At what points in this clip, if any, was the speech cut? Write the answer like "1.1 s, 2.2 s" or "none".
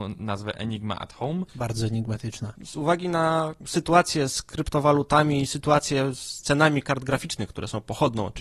2.6 s

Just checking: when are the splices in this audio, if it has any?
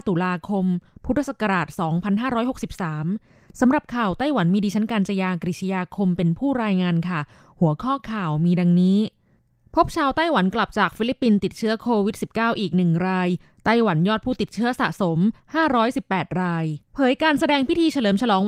16.9 s

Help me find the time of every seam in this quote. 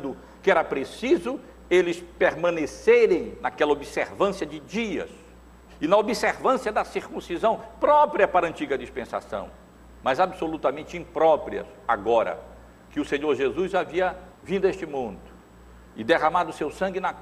5.7 s, 14.3 s

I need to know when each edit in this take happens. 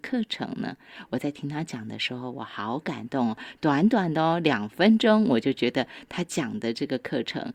none

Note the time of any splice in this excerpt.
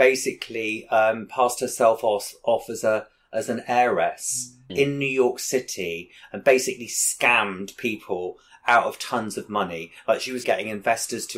4.7 s, 10.4 s

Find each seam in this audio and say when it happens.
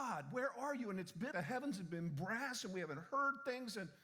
1.3 s

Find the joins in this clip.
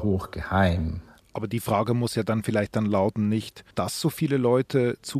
1.2 s, 3.7 s

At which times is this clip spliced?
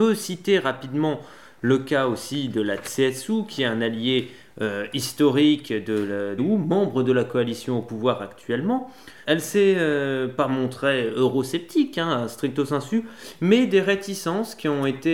6.4 s, 9.2 s

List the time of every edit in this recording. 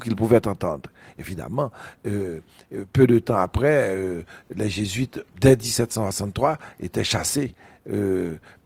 none

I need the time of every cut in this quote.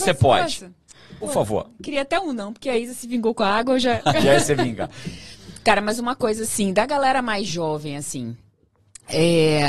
none

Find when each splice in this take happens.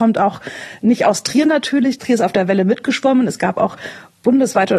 none

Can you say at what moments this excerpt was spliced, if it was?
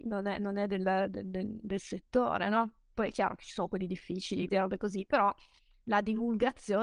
2.9 s, 4.5 s

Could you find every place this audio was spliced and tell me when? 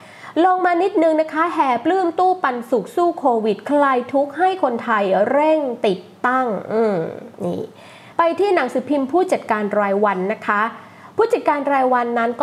none

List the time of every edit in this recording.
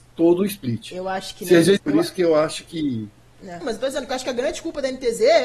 1.8 s, 3.6 s

